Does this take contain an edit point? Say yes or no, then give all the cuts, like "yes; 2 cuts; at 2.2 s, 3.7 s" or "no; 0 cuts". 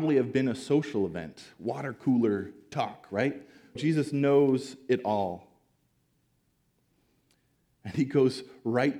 yes; 1 cut; at 3.8 s